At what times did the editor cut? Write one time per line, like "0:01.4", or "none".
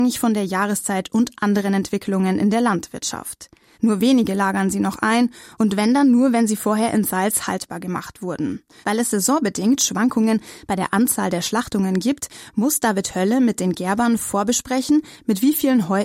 0:03.7
0:08.8